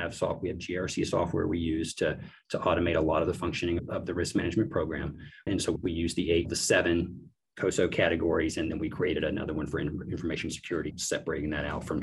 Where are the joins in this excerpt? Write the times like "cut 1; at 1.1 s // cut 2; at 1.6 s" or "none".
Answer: cut 1; at 5.5 s